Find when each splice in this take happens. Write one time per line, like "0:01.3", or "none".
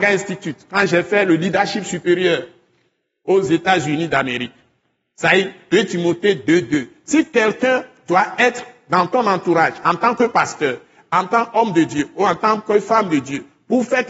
none